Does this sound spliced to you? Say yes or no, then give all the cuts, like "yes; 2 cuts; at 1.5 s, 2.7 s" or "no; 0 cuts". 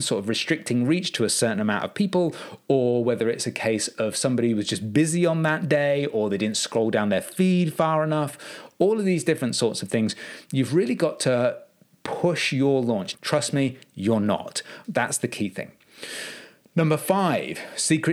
yes; 2 cuts; at 13.1 s, 14.8 s